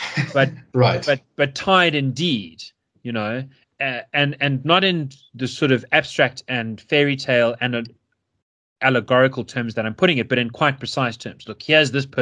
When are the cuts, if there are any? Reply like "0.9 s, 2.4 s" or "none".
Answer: 3.6 s